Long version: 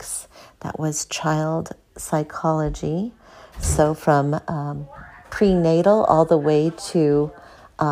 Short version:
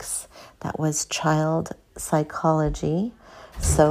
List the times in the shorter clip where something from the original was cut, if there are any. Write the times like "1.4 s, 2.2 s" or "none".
none